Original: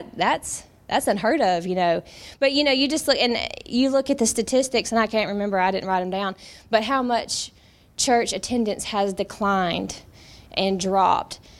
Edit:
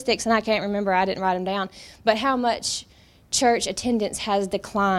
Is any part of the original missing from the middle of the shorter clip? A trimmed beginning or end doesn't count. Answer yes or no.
no